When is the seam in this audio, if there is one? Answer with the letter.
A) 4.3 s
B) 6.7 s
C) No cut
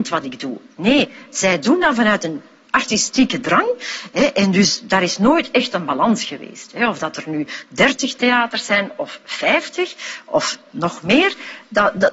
C